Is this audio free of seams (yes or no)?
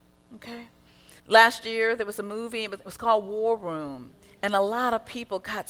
no